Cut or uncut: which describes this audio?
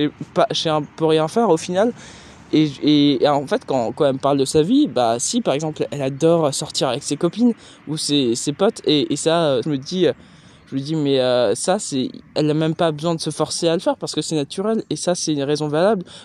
cut